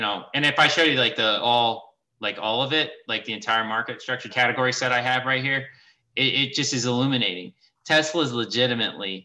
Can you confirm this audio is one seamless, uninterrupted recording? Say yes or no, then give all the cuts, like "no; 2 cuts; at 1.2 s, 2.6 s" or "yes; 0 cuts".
no; 1 cut; at 4.3 s